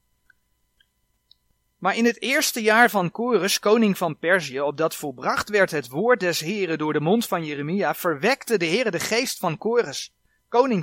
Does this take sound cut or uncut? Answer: uncut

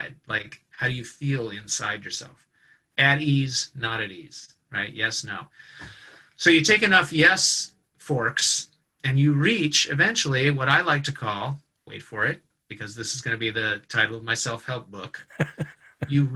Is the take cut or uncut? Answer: uncut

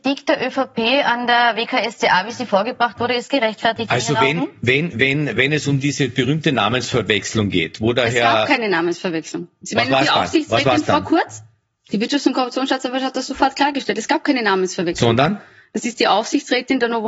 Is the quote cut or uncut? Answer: cut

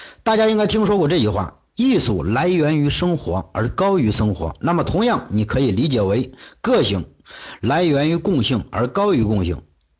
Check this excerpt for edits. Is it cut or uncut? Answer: uncut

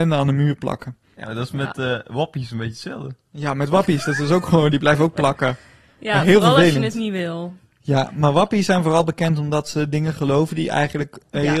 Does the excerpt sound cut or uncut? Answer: uncut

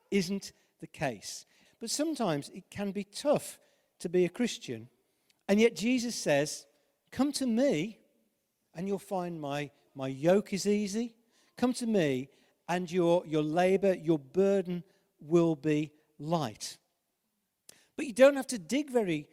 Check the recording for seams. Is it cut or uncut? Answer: cut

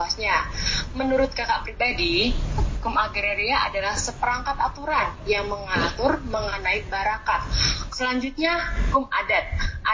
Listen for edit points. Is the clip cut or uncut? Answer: cut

